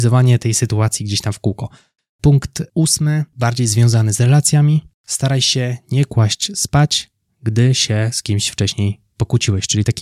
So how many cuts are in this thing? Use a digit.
1